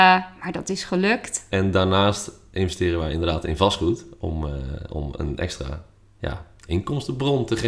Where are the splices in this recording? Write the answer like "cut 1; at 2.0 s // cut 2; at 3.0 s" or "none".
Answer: cut 1; at 1.5 s